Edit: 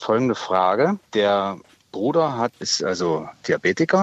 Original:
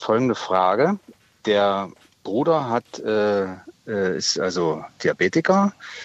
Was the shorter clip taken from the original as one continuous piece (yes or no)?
no